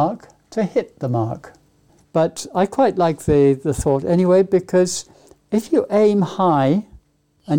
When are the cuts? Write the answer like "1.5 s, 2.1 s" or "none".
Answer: 2.0 s